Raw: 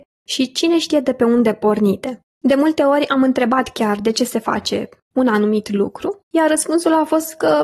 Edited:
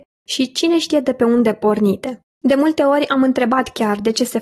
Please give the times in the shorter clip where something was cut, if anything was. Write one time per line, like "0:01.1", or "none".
none